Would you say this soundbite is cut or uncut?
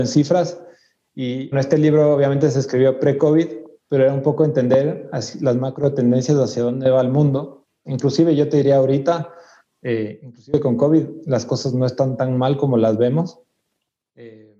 cut